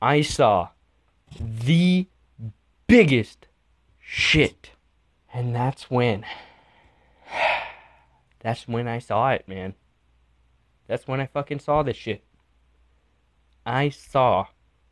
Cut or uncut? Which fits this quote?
cut